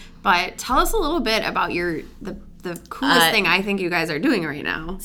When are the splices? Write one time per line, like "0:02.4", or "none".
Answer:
none